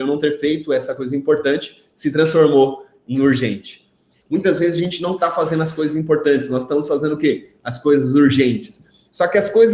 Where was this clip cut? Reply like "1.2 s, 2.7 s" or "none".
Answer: 4.2 s